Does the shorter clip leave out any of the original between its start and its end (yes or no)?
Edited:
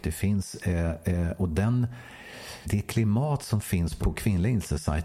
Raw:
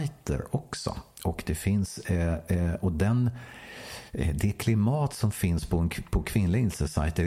yes